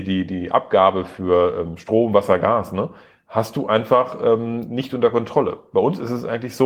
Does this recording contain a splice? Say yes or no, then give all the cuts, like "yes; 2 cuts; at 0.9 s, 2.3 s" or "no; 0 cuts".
no; 0 cuts